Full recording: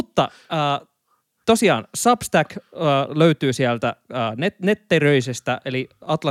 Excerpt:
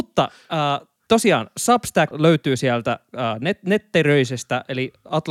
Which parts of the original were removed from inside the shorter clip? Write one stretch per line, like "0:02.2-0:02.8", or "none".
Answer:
0:01.0-0:01.3
0:02.5-0:03.1